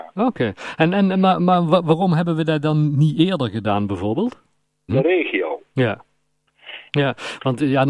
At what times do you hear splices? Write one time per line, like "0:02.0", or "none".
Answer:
0:04.9
0:06.9